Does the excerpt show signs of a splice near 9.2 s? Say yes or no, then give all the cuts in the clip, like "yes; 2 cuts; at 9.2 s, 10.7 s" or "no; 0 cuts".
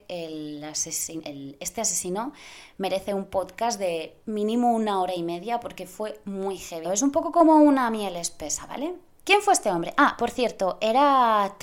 yes; 3 cuts; at 1.2 s, 6.8 s, 9.2 s